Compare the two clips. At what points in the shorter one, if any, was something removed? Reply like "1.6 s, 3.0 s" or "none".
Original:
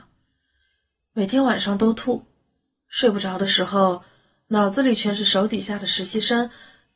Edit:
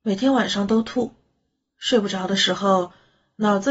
none